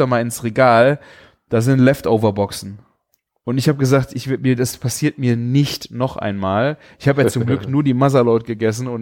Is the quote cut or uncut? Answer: uncut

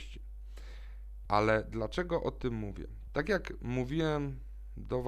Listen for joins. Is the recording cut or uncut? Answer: cut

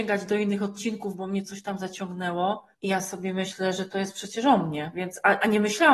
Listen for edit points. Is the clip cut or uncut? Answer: cut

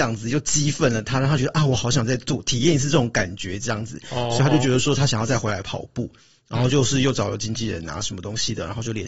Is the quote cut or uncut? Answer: uncut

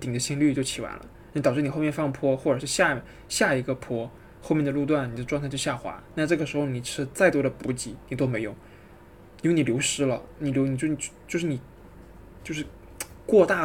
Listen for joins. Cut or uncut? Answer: uncut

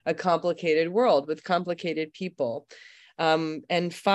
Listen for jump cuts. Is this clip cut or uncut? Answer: uncut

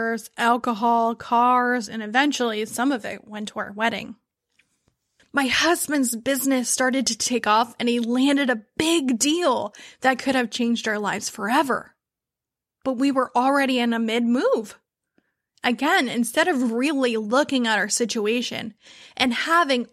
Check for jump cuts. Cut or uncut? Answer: cut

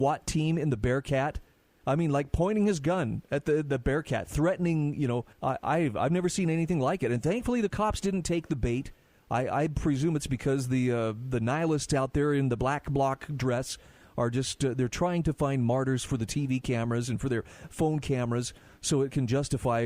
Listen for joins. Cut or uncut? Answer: cut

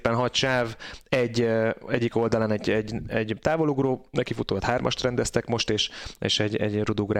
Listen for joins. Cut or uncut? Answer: uncut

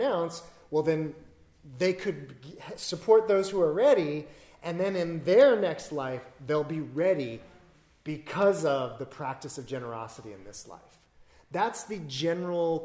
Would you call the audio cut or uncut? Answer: uncut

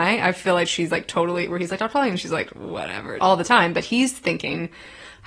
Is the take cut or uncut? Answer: cut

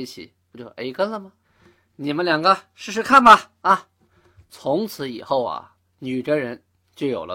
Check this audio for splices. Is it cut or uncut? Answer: uncut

